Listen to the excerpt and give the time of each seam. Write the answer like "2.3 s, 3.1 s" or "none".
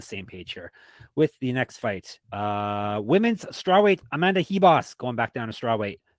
2.2 s